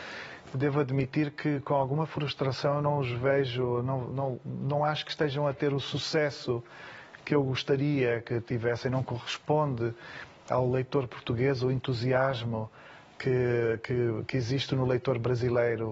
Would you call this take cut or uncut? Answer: uncut